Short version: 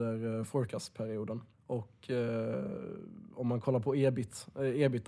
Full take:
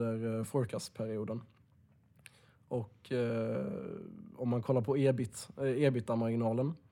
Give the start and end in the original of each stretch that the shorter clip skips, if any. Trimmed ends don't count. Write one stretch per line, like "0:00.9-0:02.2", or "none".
0:01.5-0:02.6